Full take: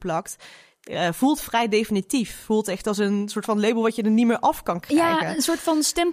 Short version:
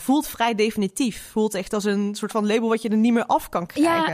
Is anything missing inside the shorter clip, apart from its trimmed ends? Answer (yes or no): no